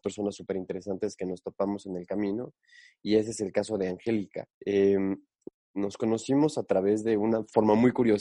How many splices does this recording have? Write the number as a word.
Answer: one